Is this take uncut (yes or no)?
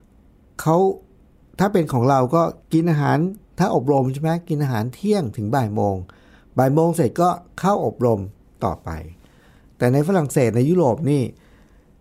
no